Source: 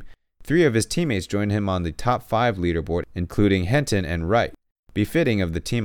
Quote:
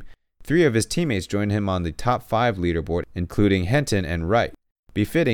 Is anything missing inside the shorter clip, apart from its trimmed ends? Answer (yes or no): no